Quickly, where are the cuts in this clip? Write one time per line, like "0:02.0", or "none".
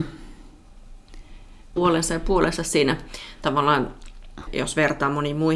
0:01.8
0:04.5